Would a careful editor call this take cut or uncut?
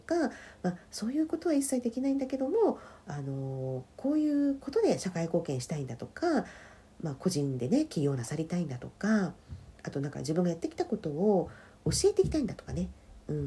cut